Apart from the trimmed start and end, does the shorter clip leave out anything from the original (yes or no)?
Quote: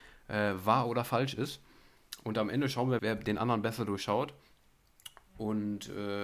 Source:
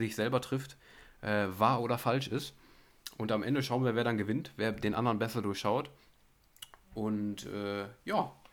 yes